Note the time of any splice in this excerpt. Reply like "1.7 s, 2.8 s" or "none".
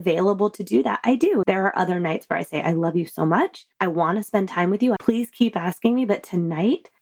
1.4 s, 5.0 s